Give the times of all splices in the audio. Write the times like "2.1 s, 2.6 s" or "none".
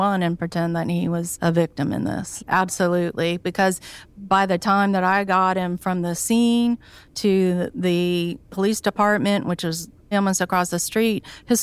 2.4 s, 10.1 s